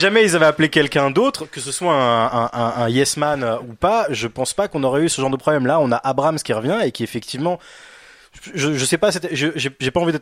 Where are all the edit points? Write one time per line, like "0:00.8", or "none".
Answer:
none